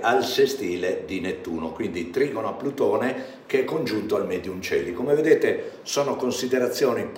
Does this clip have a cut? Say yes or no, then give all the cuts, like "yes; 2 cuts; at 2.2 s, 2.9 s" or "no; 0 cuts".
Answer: no; 0 cuts